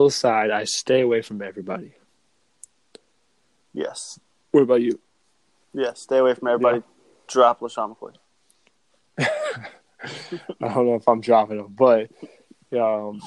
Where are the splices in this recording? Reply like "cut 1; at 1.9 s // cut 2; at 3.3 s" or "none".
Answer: none